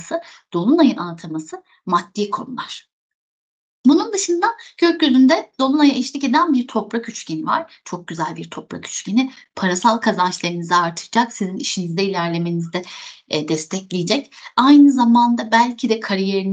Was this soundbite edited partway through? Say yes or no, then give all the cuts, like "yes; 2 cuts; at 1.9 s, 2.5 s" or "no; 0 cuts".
no; 0 cuts